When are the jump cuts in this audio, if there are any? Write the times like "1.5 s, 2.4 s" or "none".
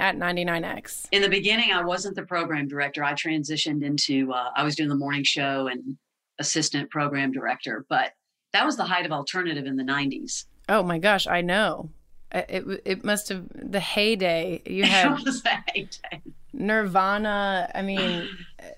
none